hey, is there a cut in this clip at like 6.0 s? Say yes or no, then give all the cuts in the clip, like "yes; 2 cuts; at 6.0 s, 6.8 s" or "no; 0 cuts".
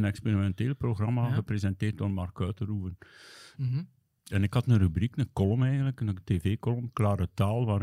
no; 1 cut; at 3.5 s